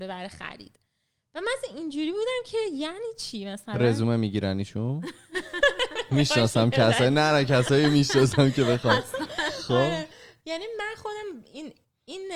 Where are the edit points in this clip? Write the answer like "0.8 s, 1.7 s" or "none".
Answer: none